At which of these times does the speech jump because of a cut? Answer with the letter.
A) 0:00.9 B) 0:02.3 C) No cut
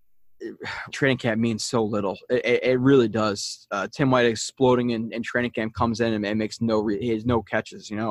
A